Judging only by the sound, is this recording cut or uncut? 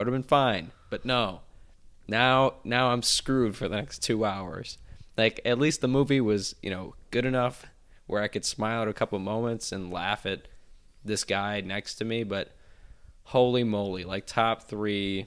uncut